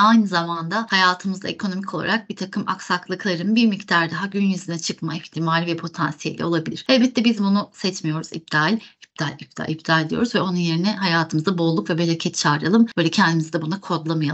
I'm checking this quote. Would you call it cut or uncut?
uncut